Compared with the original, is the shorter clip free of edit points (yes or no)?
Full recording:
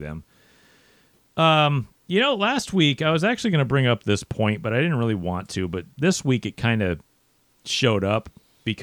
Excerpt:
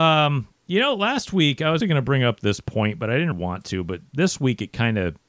no